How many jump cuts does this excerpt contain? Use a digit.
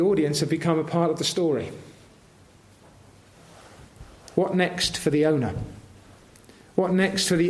0